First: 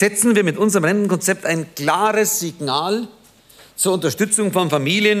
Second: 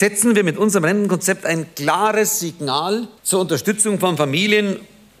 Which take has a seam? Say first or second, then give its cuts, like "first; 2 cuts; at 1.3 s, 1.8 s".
second; 1 cut; at 3.2 s